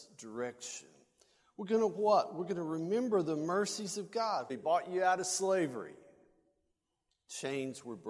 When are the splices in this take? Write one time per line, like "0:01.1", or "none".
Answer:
0:04.5